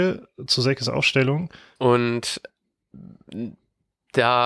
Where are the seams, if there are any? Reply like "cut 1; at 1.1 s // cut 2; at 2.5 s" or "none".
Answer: cut 1; at 1.8 s